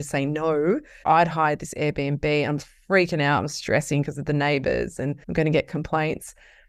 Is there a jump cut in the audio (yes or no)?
yes